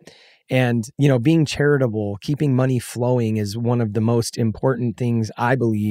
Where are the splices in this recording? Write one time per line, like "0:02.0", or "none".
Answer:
0:00.9